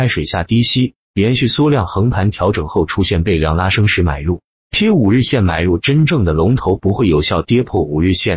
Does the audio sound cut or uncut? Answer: uncut